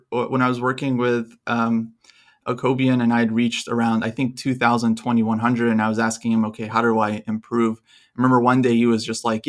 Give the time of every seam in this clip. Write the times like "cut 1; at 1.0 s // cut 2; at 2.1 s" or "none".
none